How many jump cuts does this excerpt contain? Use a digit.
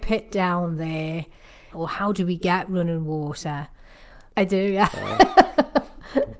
2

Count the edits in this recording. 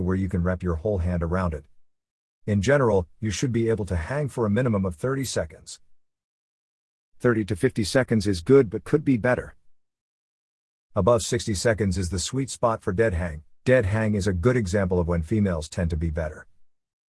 1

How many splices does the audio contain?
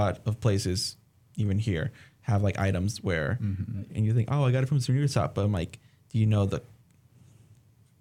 1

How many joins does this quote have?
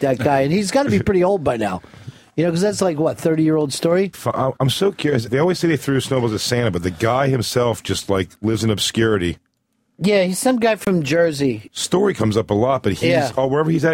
2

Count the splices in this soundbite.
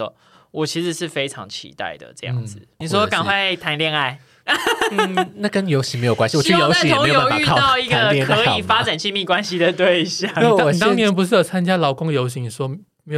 1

